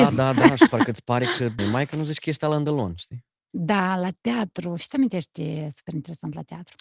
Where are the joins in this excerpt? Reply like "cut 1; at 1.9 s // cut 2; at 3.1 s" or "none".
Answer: cut 1; at 1.6 s